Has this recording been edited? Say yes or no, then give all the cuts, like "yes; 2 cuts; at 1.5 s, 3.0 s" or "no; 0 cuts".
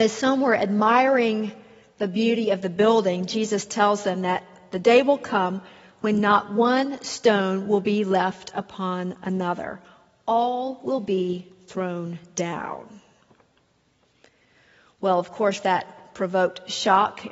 no; 0 cuts